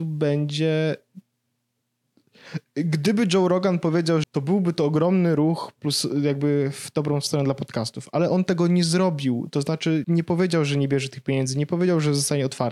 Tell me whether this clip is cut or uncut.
cut